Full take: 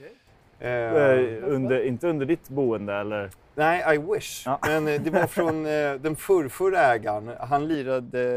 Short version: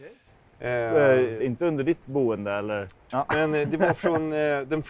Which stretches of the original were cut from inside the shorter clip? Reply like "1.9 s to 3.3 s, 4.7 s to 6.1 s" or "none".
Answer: 1.4 s to 1.8 s, 3.5 s to 4.4 s